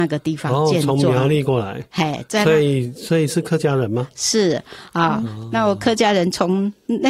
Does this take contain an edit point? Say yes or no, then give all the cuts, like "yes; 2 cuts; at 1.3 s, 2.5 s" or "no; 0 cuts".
no; 0 cuts